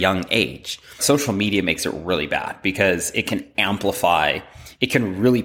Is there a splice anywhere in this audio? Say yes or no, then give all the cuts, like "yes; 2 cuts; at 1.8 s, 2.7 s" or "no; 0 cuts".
yes; 1 cut; at 1.0 s